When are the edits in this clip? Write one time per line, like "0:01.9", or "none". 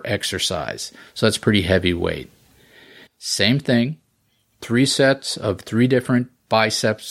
0:03.1